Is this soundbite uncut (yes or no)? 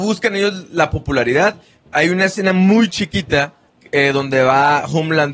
yes